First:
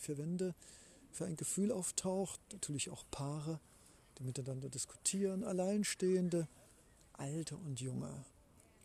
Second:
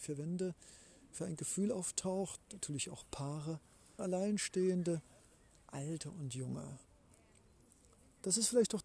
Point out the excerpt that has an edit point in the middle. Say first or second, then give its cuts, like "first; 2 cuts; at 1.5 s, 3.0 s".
second; 1 cut; at 4.0 s